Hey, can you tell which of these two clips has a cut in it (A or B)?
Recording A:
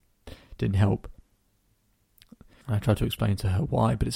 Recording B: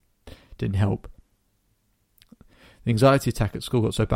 A